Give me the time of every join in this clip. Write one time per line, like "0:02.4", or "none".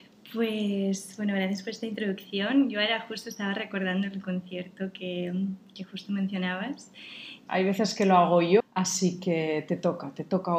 0:07.5
0:08.6